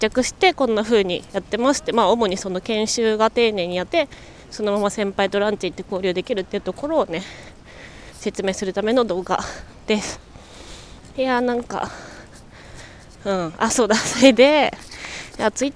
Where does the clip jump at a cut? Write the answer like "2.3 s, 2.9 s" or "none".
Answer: 3.9 s